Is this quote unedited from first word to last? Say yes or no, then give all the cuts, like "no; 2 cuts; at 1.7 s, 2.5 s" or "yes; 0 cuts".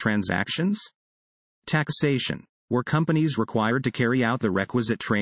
no; 1 cut; at 2.5 s